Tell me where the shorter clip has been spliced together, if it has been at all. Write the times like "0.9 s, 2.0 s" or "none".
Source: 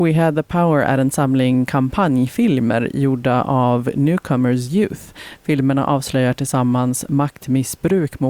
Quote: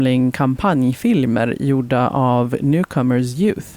none